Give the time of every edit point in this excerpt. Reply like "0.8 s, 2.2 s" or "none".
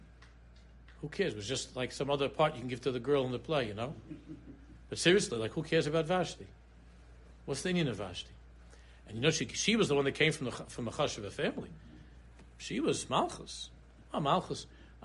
none